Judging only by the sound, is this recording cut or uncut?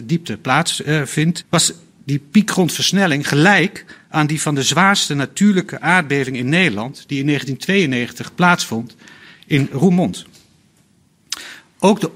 cut